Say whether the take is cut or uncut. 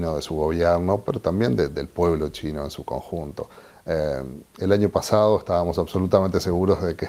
uncut